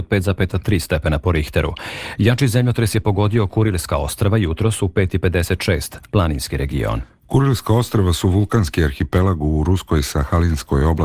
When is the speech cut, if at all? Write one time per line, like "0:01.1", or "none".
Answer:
0:06.1